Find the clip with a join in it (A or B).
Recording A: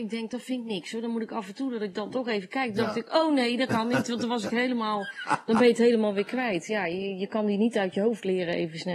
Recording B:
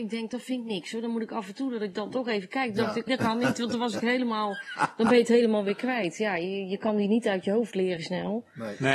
B